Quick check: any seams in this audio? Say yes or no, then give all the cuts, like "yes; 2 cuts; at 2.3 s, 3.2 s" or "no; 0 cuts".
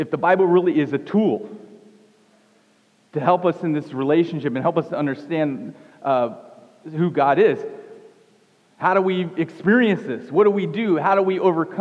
no; 0 cuts